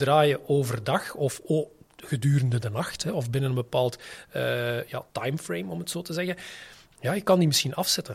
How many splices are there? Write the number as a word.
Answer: one